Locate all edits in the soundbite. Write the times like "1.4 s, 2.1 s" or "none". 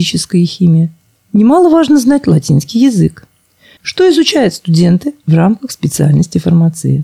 3.8 s